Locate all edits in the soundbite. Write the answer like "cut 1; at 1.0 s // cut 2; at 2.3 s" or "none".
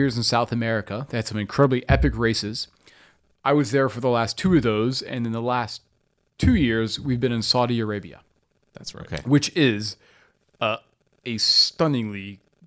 none